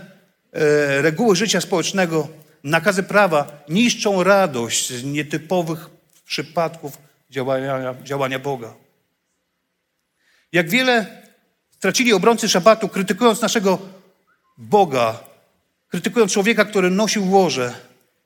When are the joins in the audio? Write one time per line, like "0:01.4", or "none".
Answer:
none